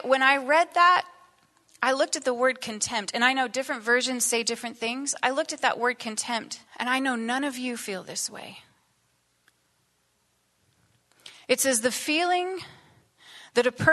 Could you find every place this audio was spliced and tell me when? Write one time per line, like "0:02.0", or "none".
0:06.7